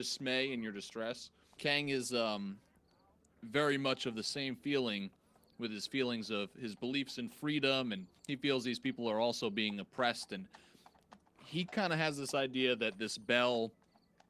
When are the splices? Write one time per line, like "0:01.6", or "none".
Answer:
0:01.5
0:08.2